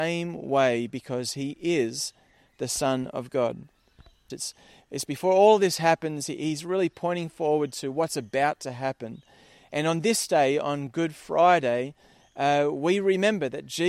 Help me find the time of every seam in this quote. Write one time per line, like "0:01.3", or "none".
0:04.3